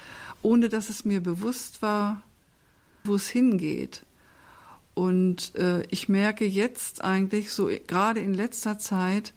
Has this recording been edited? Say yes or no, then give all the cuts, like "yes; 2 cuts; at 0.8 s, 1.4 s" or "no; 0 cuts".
yes; 1 cut; at 3.1 s